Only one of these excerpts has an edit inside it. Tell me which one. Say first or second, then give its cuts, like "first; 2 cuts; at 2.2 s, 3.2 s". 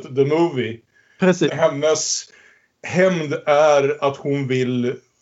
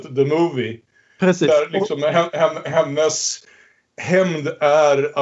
first; 1 cut; at 1.5 s